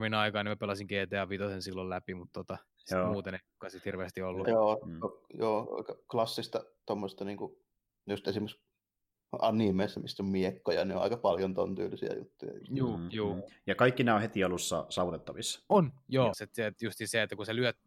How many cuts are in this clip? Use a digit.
2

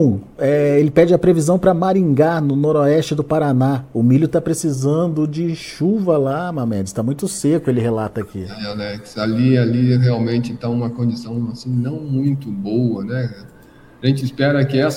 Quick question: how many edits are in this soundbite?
0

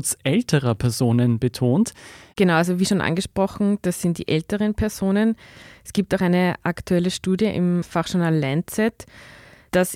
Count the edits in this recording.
1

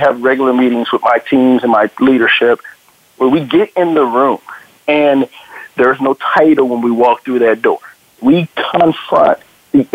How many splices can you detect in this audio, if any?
1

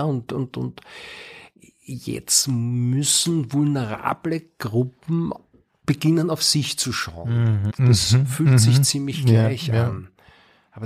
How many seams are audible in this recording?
1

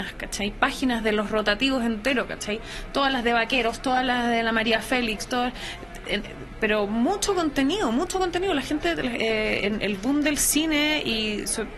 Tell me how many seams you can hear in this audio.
1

